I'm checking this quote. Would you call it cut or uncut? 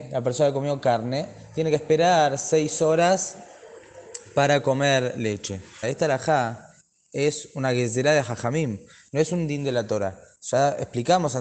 cut